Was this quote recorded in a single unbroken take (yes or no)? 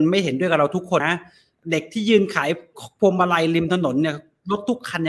no